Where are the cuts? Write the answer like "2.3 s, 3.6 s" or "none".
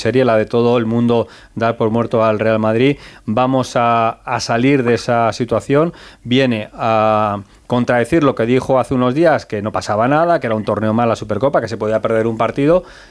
none